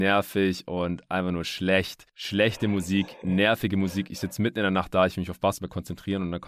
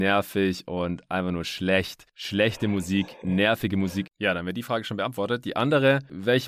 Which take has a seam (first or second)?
second